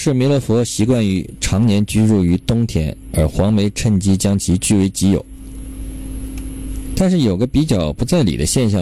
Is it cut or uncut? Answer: cut